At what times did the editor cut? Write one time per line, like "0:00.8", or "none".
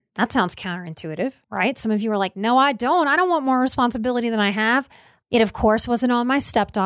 0:01.4
0:05.2